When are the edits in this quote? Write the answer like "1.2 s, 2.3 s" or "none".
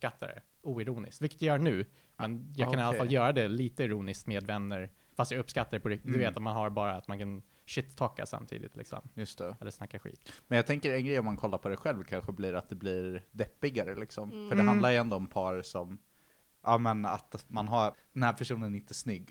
17.9 s